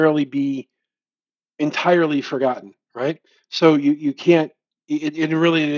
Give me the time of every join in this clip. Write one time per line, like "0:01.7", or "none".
none